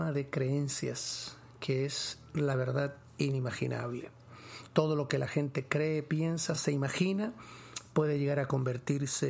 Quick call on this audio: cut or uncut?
uncut